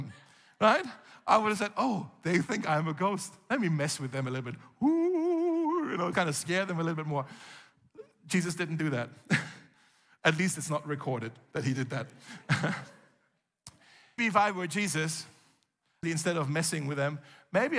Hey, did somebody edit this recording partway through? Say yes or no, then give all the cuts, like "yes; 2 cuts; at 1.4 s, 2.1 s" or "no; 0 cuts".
yes; 3 cuts; at 6.1 s, 14.2 s, 16.0 s